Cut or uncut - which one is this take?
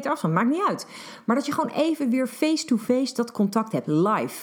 uncut